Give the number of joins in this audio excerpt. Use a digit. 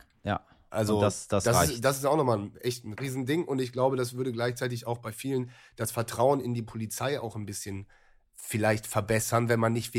1